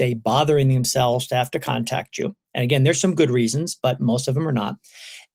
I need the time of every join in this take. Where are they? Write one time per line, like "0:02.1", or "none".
none